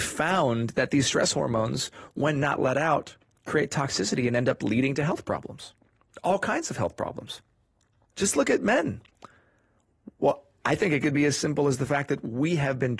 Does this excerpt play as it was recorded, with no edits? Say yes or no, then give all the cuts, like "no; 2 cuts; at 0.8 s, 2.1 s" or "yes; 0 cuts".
no; 2 cuts; at 8.1 s, 10.2 s